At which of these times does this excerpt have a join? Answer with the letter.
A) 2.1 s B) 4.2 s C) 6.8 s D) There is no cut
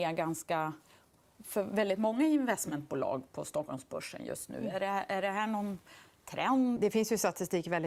C